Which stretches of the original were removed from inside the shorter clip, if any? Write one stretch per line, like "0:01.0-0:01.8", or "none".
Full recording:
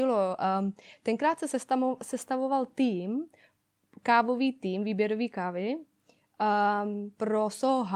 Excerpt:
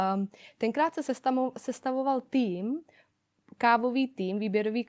none